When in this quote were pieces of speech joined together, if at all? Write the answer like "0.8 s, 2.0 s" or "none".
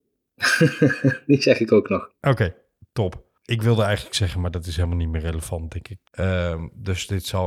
6.1 s